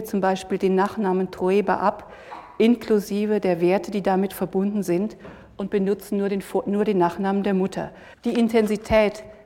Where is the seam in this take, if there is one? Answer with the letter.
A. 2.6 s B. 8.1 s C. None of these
B